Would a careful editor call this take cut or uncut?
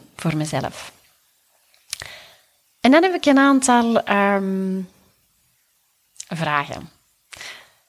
uncut